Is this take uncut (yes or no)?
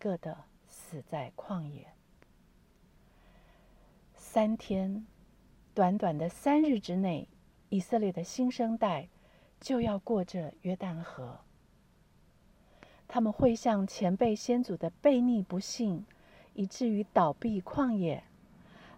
yes